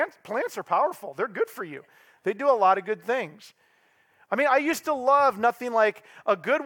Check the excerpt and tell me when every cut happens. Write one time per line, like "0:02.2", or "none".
none